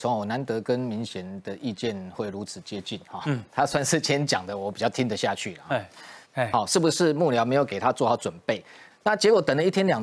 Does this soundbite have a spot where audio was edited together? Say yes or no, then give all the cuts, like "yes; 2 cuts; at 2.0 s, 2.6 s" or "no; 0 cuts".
yes; 2 cuts; at 6.3 s, 8.9 s